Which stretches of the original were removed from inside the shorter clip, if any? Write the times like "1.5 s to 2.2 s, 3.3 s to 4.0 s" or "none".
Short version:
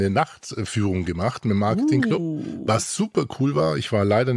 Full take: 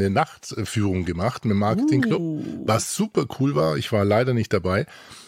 none